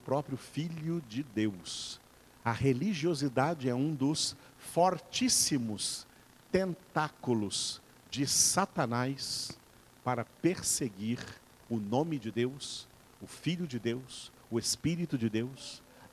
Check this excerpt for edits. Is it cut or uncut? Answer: cut